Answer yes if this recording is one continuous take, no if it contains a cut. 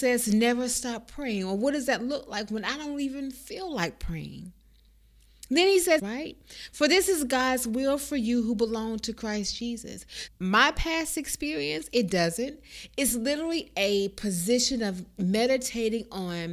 no